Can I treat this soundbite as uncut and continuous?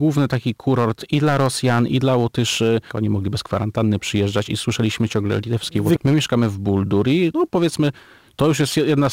no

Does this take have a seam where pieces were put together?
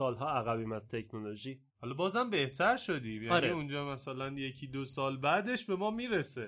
yes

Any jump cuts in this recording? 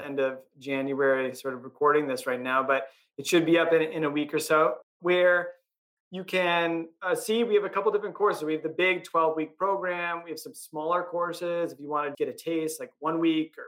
yes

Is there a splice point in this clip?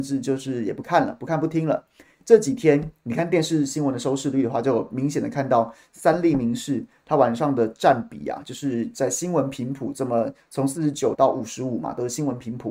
yes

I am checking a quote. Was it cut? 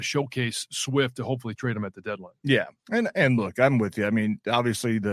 yes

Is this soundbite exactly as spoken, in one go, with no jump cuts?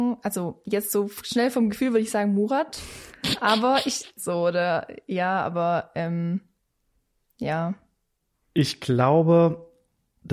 no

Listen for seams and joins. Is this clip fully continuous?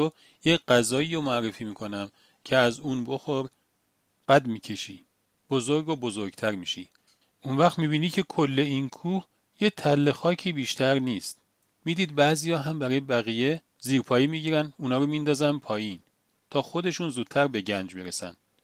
no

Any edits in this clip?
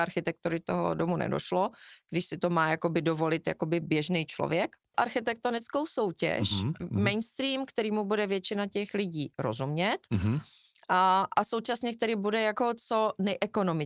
yes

